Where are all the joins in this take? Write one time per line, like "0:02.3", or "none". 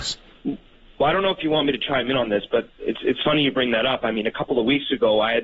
none